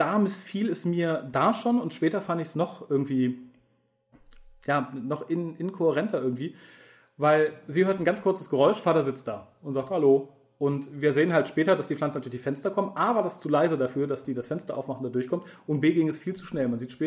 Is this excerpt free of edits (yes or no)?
yes